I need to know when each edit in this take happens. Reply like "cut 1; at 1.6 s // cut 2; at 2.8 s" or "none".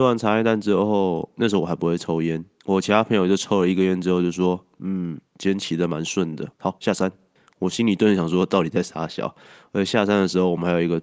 cut 1; at 5.3 s // cut 2; at 6.6 s